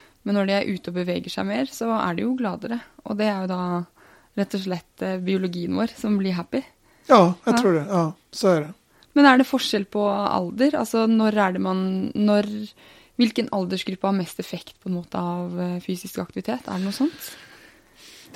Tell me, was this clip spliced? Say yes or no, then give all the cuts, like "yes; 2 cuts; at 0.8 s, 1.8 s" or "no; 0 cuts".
no; 0 cuts